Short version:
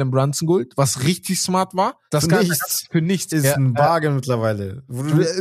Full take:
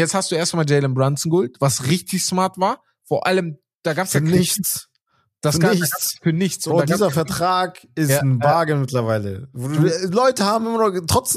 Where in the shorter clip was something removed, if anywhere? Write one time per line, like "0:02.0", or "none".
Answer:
0:02.1
0:03.3

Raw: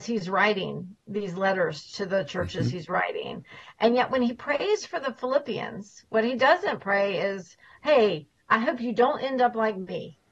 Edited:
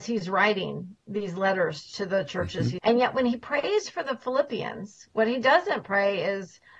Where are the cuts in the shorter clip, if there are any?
0:02.8

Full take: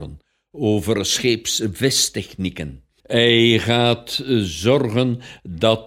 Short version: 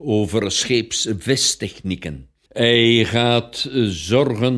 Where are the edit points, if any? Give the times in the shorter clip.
none

